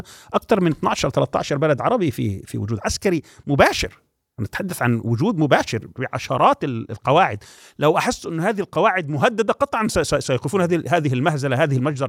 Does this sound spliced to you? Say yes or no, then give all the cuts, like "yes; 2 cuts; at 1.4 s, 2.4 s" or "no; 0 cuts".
no; 0 cuts